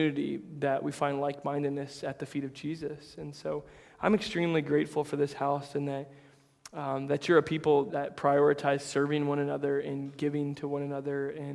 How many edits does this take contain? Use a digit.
1